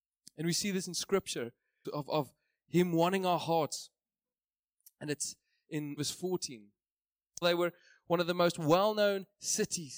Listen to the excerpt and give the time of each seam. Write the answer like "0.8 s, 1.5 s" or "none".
1.8 s, 6.0 s, 7.4 s